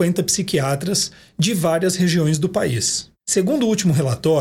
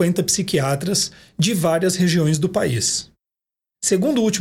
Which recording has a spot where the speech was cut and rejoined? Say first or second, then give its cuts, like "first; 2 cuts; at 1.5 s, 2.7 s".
first; 1 cut; at 3.2 s